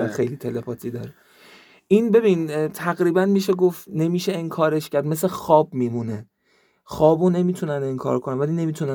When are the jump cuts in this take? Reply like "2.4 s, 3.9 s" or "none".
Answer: none